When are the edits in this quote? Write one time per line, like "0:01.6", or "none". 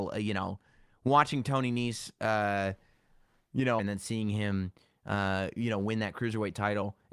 0:03.8